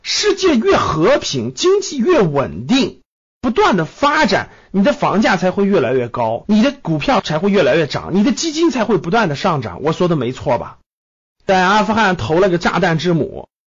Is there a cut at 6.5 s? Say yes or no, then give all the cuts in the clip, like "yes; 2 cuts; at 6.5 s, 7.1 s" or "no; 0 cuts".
no; 1 cut; at 11.3 s